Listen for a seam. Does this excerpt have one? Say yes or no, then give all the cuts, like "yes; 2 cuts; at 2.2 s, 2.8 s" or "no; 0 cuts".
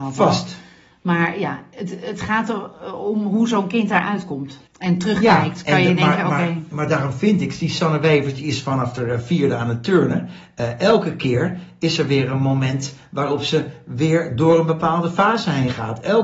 yes; 1 cut; at 4.7 s